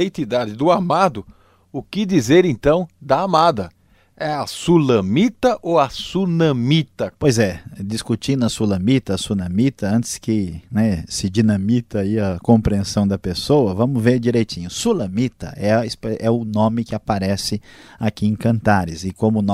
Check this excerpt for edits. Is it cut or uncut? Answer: cut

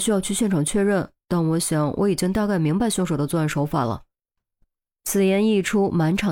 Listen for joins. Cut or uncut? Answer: uncut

